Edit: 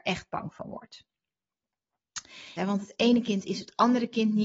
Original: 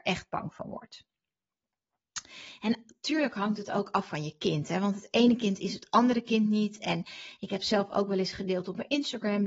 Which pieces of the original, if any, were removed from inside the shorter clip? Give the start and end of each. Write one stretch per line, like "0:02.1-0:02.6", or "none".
0:02.6-0:04.7